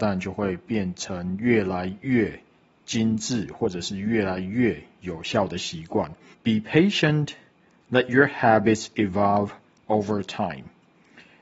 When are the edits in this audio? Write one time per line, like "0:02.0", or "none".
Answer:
0:06.3